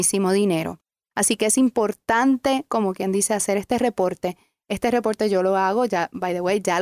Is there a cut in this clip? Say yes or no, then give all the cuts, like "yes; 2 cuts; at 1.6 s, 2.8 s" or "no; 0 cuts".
no; 0 cuts